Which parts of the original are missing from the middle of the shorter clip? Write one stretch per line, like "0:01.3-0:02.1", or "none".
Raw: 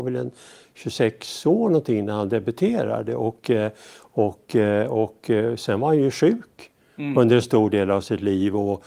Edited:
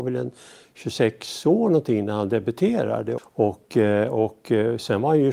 0:03.2-0:04.0